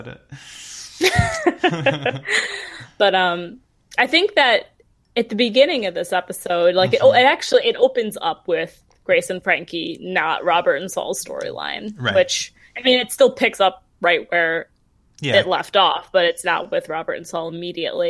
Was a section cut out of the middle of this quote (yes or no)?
no